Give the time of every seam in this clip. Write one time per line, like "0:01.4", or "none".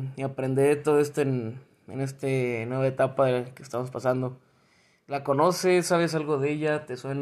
0:05.0